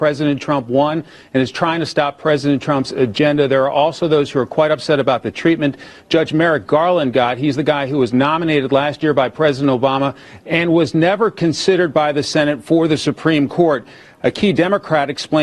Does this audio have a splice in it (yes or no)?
no